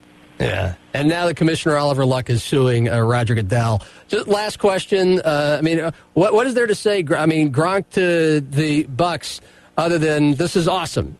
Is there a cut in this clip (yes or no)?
no